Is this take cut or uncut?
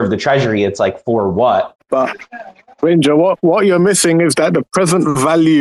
cut